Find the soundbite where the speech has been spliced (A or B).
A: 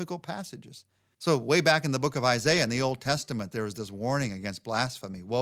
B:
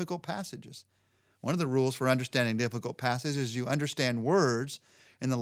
A